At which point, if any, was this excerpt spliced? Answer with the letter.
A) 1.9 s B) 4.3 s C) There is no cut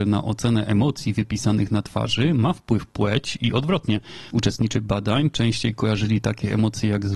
B